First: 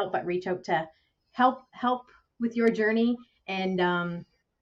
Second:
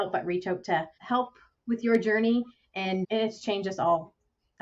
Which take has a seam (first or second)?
second